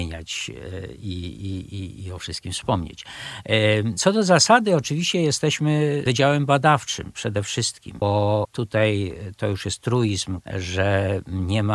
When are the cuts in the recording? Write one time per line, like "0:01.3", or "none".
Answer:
0:04.0
0:08.0
0:10.4